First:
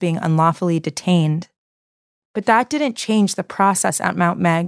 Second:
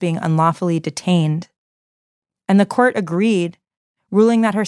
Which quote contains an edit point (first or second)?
first